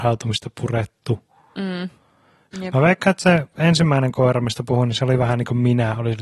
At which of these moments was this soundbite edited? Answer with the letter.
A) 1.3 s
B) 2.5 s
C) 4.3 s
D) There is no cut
B